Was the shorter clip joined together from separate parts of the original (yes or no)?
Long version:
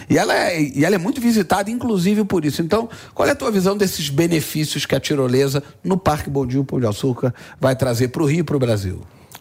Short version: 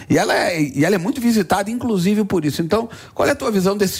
no